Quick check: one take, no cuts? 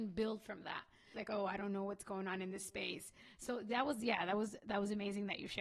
no; 1 cut; at 1.1 s

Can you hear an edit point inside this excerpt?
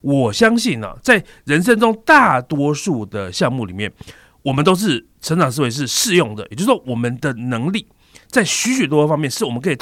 no; 0 cuts

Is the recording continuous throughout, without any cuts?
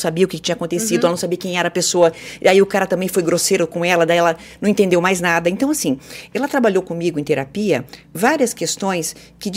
yes; 0 cuts

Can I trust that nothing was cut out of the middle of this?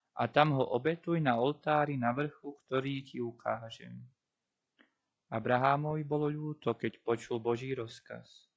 yes; 0 cuts

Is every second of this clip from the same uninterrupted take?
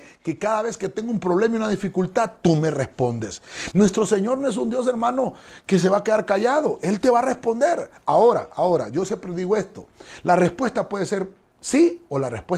no; 1 cut; at 3.7 s

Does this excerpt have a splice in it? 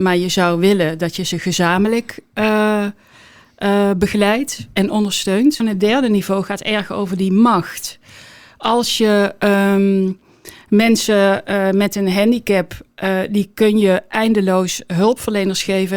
yes; 1 cut; at 5.6 s

